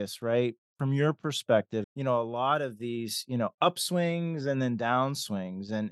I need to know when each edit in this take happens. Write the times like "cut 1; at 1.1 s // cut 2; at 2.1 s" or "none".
cut 1; at 1.8 s